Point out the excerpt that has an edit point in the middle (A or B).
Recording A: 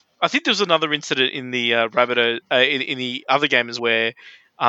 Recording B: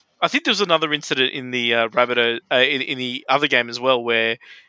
A